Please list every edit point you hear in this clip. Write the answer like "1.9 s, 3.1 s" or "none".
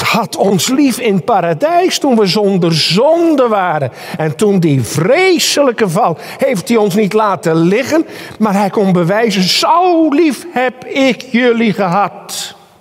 none

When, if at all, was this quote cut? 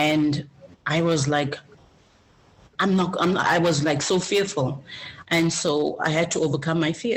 5.2 s

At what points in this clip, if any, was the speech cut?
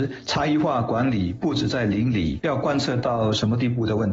2.4 s

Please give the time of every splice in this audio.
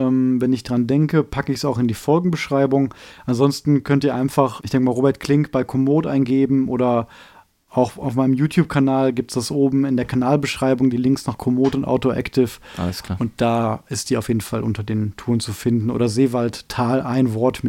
4.6 s

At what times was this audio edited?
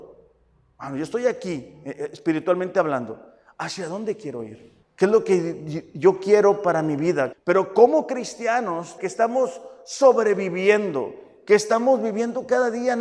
4.8 s, 7.3 s, 9.0 s

